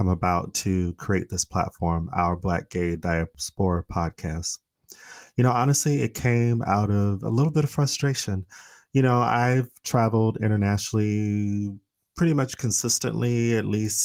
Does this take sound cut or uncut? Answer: uncut